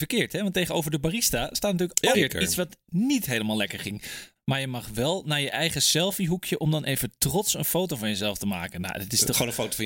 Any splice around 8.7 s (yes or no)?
no